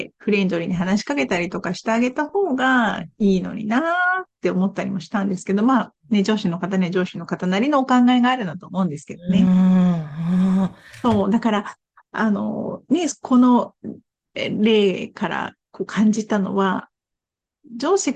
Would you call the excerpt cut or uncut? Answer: uncut